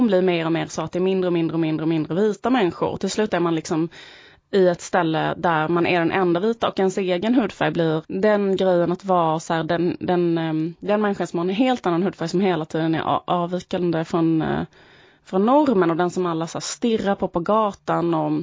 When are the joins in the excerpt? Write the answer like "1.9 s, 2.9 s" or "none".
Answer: 8.0 s